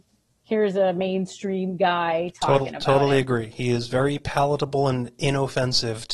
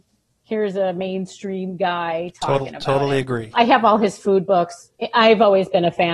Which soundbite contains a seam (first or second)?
second